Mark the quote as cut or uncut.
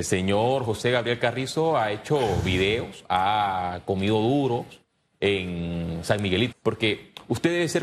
cut